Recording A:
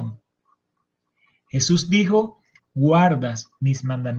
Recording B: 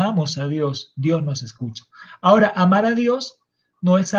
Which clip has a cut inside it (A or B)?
A